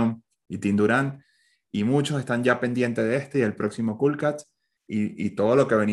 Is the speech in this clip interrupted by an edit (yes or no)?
no